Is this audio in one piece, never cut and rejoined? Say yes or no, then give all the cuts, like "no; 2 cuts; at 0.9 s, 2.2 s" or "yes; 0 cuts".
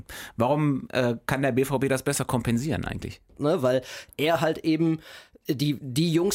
no; 1 cut; at 3.3 s